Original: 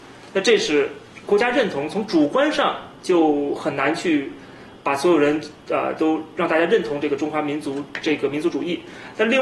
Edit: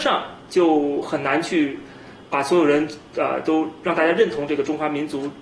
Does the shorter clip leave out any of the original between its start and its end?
no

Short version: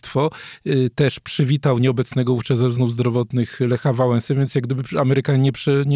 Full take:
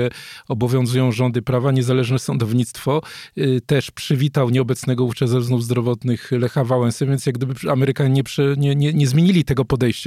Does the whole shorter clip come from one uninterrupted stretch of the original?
yes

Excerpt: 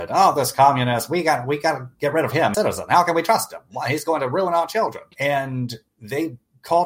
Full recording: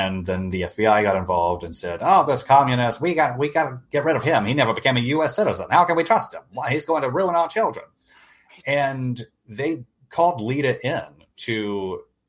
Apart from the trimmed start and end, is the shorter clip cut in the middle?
yes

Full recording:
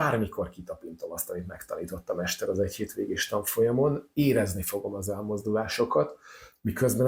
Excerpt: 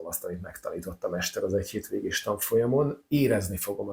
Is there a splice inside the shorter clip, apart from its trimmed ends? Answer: no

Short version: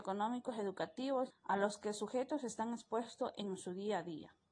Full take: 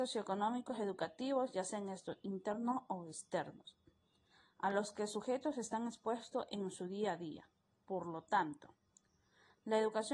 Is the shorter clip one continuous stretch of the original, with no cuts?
no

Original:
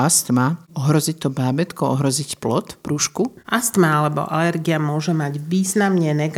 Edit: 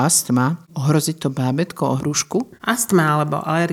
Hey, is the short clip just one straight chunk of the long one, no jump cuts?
no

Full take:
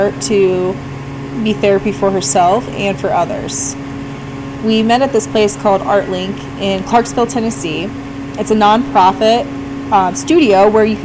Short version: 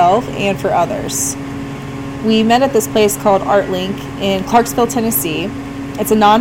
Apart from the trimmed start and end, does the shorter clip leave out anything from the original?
no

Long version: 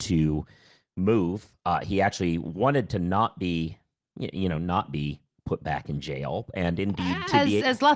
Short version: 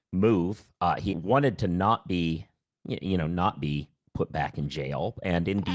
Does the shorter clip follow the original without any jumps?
no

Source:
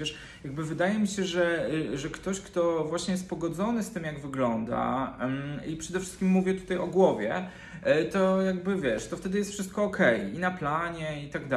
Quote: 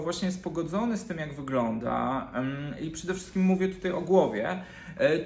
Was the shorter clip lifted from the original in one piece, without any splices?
yes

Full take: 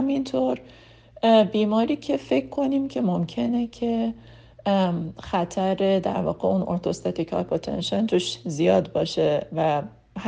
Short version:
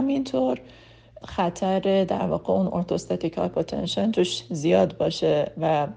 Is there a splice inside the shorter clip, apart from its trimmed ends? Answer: yes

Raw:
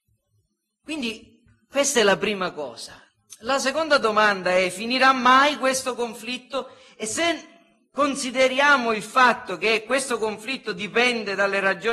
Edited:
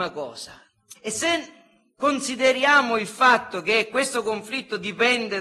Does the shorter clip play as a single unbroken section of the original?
no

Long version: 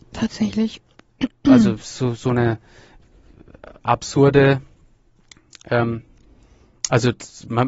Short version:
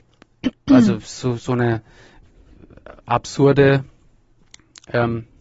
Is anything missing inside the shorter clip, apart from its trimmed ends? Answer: no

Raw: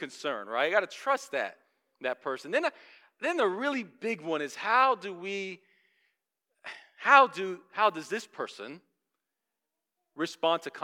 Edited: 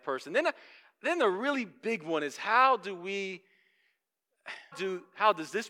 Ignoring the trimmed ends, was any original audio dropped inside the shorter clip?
yes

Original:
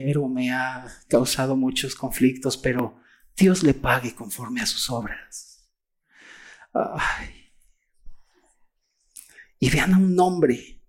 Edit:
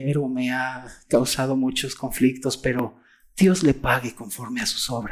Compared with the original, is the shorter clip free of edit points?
yes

